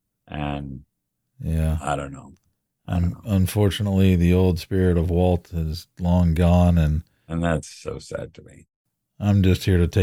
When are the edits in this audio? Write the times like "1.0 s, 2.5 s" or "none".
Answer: none